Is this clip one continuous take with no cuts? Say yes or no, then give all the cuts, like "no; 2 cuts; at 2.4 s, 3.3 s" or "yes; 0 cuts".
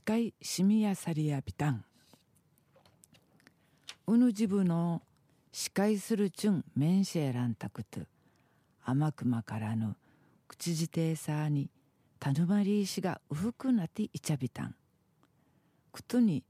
yes; 0 cuts